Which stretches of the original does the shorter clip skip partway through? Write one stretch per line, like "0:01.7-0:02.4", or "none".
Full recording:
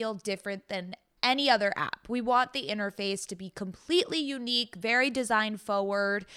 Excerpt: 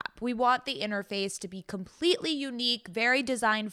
none